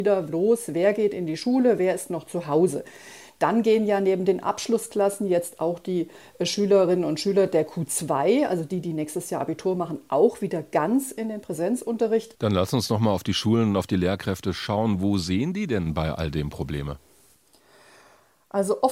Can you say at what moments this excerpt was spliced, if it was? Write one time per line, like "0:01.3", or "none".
0:12.3